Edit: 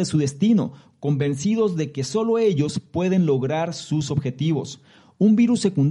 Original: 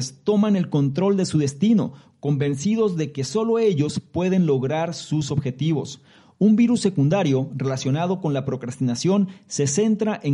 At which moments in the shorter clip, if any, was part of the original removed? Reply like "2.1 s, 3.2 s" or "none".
none